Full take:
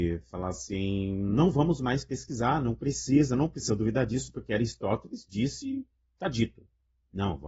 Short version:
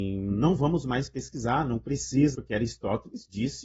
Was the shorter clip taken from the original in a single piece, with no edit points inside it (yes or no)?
no